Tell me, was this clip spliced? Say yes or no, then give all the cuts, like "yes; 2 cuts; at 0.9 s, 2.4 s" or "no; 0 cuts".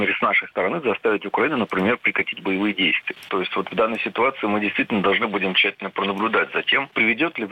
yes; 1 cut; at 3.3 s